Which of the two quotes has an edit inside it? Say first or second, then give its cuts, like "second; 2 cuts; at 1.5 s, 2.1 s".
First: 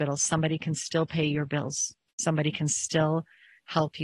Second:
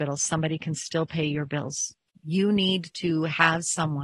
second; 1 cut; at 2.1 s